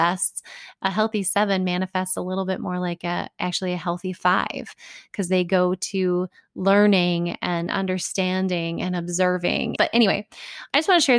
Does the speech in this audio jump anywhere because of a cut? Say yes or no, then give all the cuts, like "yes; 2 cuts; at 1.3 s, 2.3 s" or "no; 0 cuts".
yes; 1 cut; at 9.8 s